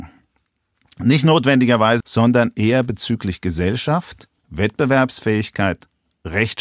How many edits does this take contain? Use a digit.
2